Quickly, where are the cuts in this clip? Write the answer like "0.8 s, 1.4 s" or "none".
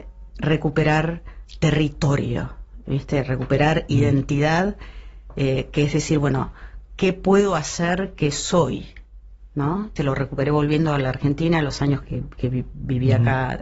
10.0 s, 12.0 s